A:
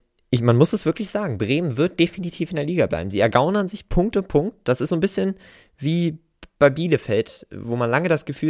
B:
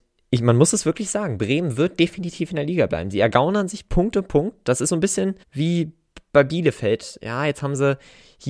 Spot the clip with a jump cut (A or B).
B